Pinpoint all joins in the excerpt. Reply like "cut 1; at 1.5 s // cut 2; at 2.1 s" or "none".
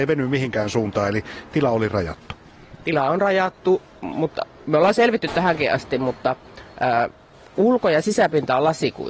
none